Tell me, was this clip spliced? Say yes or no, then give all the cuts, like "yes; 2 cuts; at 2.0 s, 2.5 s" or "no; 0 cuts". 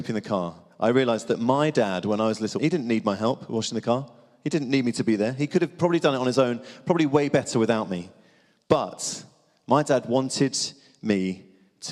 yes; 1 cut; at 2.6 s